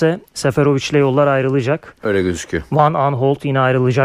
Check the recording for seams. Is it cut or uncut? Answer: uncut